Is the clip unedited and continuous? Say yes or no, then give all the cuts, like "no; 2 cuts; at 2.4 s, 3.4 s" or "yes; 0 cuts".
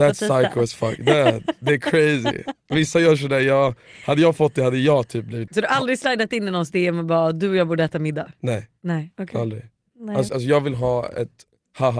no; 2 cuts; at 5.5 s, 10.3 s